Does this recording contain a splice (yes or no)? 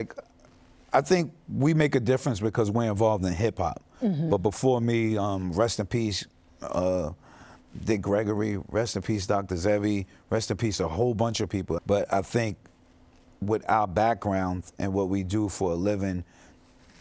yes